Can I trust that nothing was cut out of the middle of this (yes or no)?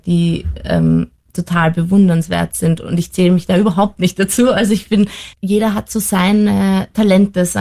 no